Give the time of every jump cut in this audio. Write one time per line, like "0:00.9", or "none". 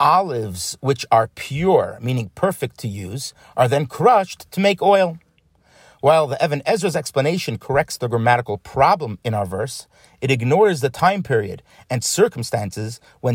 none